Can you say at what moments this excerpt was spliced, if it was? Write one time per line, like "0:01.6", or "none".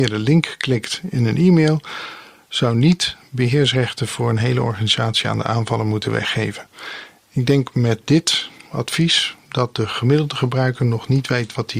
none